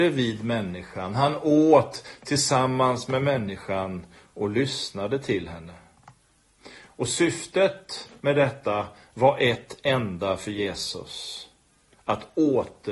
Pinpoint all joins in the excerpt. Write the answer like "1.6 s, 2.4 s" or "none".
none